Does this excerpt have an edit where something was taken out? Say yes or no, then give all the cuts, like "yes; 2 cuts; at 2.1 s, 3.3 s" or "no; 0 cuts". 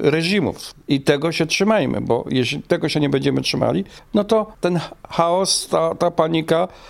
no; 0 cuts